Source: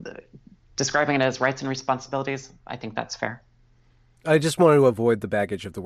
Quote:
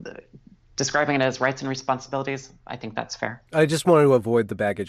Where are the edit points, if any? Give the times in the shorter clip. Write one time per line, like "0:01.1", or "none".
0:03.5

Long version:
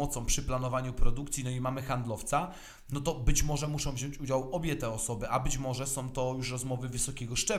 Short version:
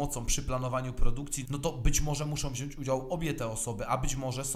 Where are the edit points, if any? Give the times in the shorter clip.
0:01.4

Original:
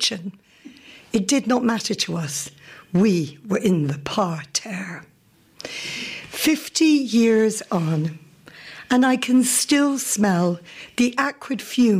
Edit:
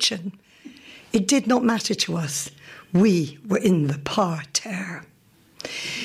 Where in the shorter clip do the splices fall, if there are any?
none

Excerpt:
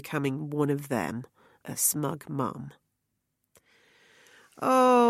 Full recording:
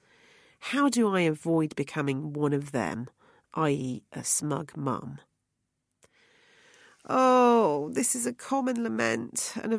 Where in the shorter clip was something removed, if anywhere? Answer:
0:01.6

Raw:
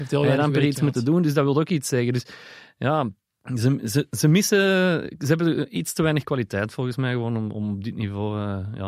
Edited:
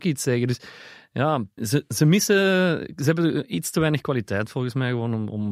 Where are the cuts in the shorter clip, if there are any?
0:01.6

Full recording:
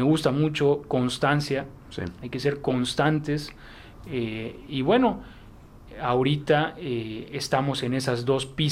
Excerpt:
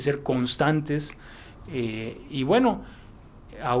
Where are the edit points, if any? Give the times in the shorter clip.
none

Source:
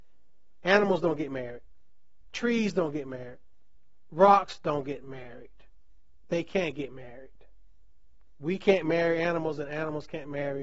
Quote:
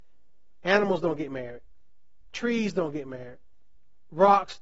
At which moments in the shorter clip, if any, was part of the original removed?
none

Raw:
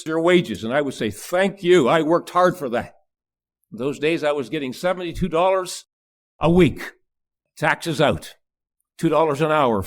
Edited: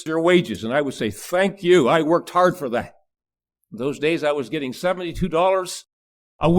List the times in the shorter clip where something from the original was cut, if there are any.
none

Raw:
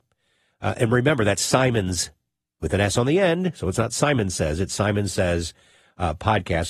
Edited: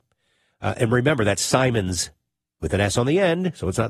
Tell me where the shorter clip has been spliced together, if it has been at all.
none

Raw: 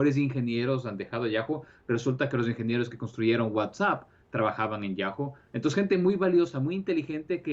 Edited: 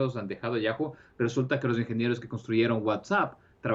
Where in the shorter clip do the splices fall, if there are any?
none

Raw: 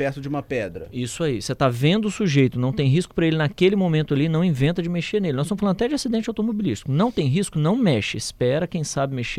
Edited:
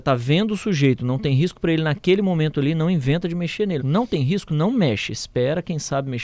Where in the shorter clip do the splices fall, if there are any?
0:03.8

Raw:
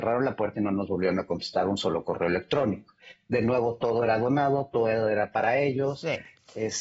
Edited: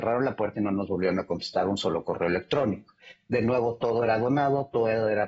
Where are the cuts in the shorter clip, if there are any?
none

